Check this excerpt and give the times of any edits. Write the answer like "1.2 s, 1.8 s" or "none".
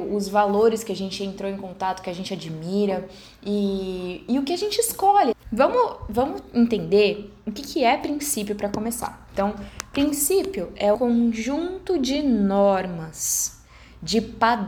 5.3 s, 10.9 s